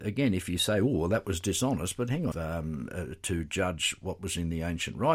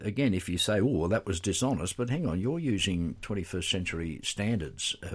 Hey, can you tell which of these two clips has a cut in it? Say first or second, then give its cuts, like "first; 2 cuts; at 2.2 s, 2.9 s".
first; 1 cut; at 2.3 s